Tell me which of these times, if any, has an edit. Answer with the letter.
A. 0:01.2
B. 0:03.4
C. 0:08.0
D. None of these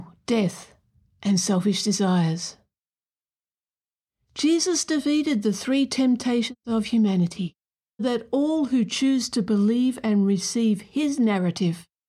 C